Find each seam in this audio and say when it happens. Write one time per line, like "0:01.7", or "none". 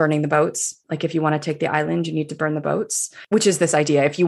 none